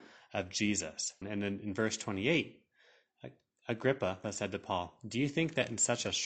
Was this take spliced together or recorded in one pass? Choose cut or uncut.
cut